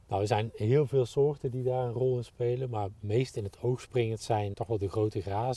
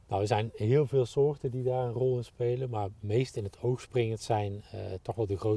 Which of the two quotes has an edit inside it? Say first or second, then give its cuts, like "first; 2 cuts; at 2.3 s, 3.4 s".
first; 1 cut; at 4.5 s